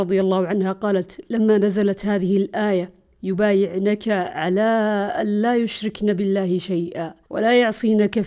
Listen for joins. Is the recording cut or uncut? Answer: cut